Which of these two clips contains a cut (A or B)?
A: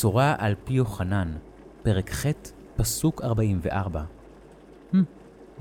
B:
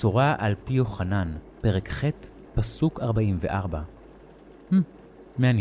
B